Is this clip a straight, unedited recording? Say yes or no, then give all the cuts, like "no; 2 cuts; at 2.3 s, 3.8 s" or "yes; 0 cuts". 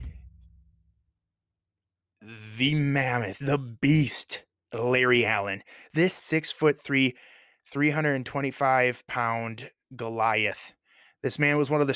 yes; 0 cuts